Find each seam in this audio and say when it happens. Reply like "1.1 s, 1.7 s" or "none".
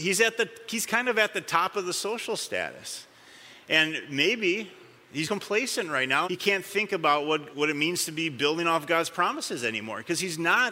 5.2 s, 6.2 s, 7.5 s